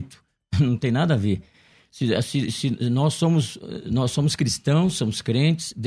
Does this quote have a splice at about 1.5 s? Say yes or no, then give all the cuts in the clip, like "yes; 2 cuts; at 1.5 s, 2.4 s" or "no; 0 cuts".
no; 0 cuts